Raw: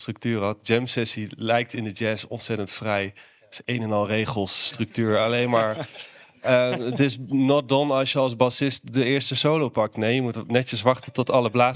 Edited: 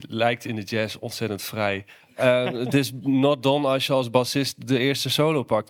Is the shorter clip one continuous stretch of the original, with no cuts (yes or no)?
no